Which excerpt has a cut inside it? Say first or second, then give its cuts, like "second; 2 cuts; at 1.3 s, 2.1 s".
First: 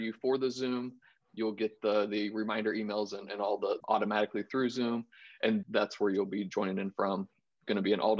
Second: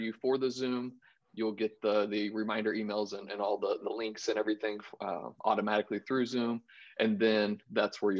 first; 2 cuts; at 3.8 s, 5.6 s